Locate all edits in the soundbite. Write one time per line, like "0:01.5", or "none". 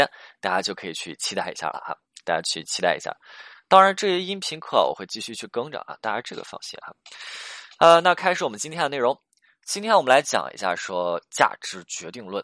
none